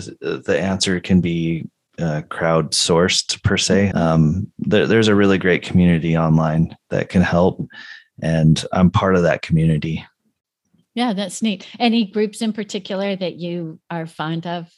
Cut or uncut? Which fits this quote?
cut